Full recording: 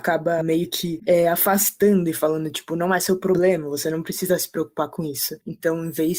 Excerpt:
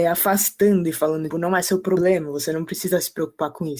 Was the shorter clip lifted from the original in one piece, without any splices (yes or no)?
no